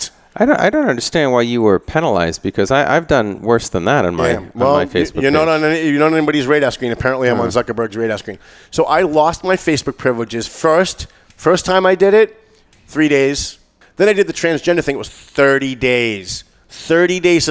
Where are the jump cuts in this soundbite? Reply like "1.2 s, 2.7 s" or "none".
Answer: 13.8 s

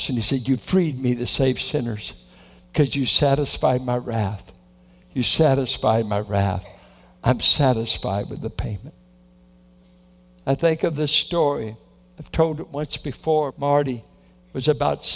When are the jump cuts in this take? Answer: 13.5 s

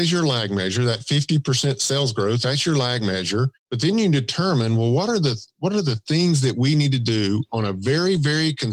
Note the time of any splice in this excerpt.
3.6 s

